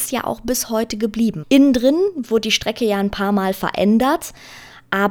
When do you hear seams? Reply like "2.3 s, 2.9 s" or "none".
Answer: 1.4 s